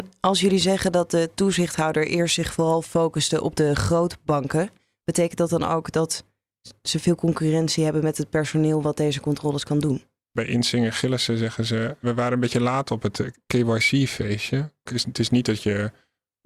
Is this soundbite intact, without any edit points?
no; 1 cut; at 14.9 s

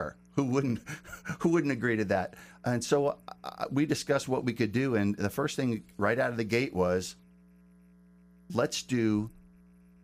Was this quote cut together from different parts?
no; 0 cuts

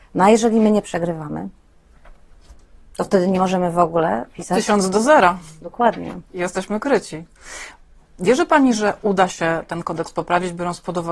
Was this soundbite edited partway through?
no; 0 cuts

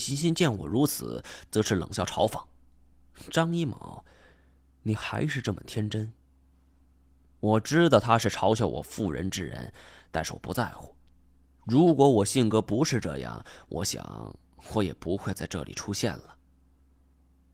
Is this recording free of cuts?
yes; 0 cuts

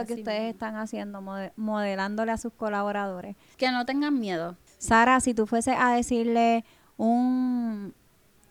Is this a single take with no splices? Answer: no; 2 cuts; at 3.5 s, 4.7 s

